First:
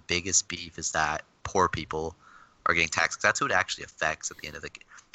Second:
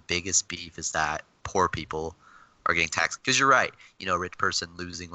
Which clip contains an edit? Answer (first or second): second